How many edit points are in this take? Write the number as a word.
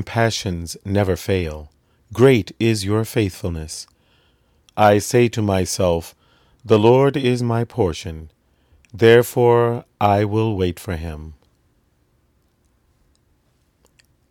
one